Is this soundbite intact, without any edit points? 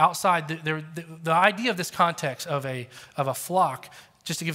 yes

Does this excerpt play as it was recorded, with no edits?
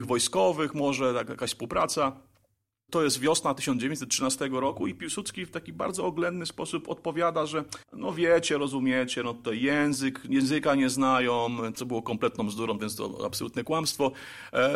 no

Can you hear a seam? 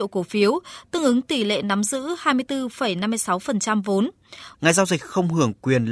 yes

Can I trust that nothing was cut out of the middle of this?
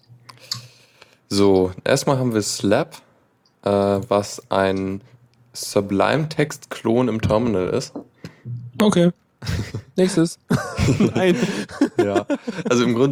yes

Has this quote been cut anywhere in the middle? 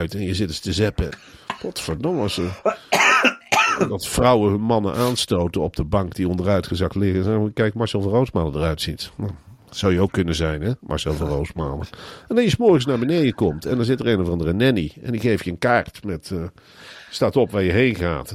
yes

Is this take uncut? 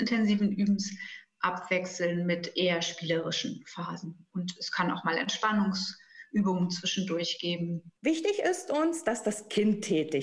no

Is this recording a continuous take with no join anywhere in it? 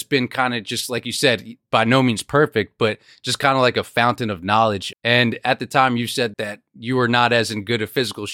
no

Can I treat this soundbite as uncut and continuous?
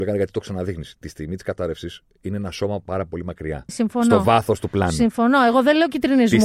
no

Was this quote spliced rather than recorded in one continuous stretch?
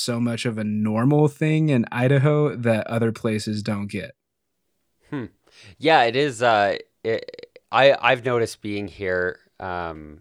no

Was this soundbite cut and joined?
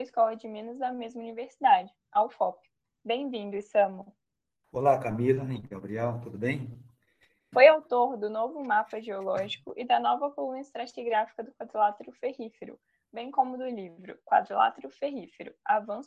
yes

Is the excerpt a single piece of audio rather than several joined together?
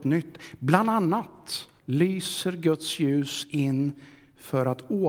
no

